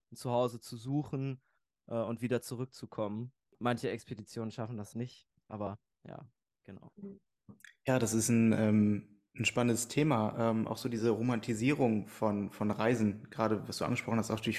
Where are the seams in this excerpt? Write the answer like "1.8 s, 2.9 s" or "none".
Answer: 4.9 s